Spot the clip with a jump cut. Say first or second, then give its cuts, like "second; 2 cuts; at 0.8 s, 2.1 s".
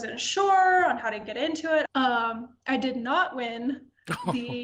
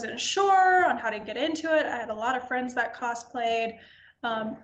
first; 1 cut; at 1.9 s